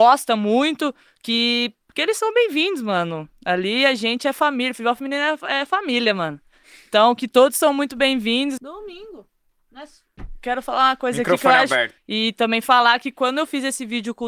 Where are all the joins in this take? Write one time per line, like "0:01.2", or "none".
0:08.6
0:10.2
0:12.0